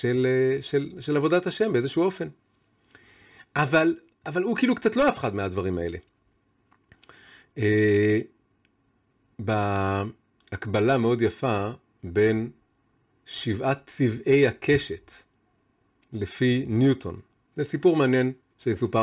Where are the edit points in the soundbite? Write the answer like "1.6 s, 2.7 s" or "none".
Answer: 10.4 s, 17.5 s